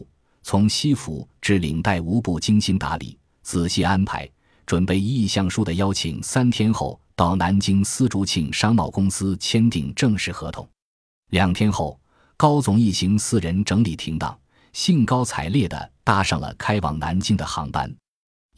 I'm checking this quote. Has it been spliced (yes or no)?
no